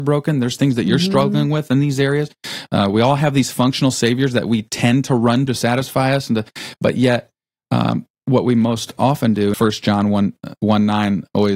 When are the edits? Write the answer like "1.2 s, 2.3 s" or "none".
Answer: 5.5 s, 9.5 s